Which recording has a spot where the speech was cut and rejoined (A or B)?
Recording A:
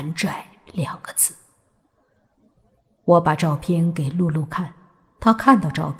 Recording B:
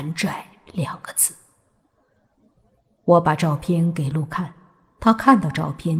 B